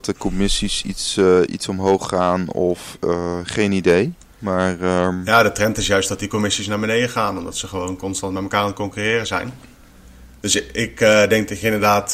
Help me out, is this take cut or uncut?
uncut